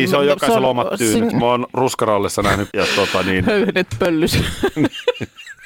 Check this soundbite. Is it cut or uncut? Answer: cut